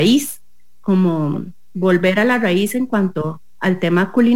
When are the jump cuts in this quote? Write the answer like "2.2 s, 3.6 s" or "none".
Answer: none